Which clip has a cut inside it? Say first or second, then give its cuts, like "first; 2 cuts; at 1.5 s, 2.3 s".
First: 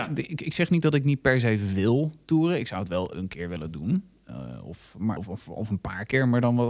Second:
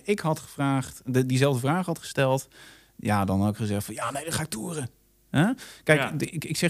first; 1 cut; at 5.2 s